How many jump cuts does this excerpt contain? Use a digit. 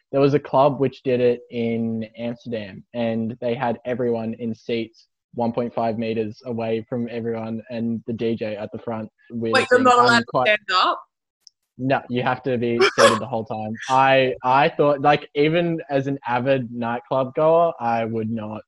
1